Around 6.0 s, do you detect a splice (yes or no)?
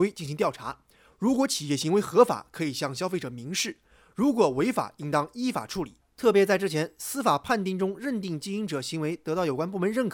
yes